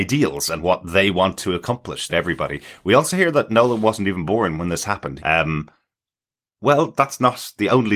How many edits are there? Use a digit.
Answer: 2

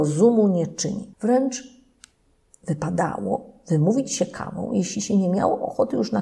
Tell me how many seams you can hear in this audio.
1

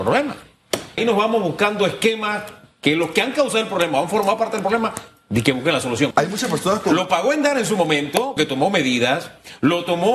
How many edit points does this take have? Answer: 3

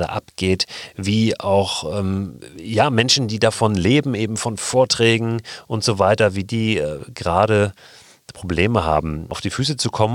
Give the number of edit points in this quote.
0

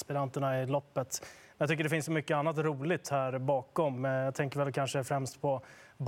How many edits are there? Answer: 0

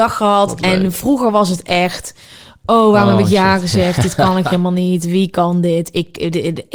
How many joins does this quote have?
0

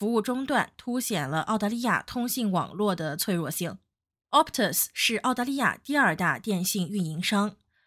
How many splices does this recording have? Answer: 0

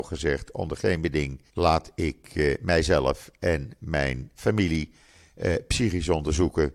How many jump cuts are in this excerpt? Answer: 1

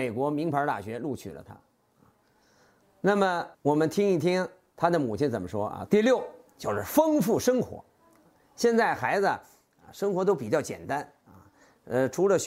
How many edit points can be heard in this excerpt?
2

